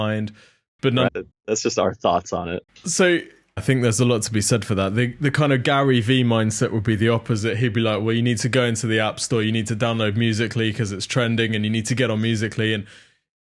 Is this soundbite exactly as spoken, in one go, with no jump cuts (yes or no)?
no